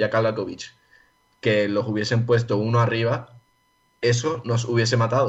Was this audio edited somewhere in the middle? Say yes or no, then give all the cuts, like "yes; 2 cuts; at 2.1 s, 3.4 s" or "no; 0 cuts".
no; 0 cuts